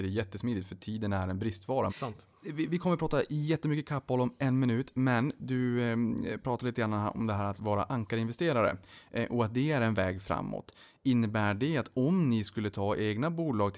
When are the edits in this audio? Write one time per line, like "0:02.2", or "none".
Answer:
0:01.9